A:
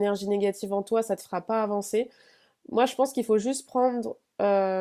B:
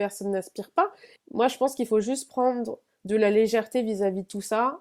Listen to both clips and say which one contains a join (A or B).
B